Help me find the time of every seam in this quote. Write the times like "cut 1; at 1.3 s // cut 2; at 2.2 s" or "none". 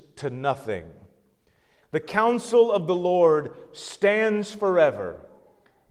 cut 1; at 1.8 s